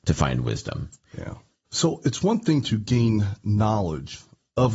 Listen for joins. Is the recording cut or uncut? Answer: uncut